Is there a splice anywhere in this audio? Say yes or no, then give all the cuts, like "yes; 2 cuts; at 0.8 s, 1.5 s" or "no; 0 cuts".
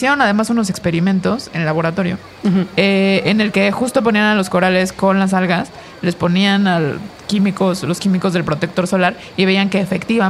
no; 0 cuts